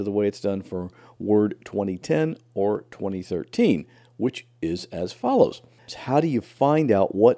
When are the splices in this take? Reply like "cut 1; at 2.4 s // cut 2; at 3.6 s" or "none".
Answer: cut 1; at 5.9 s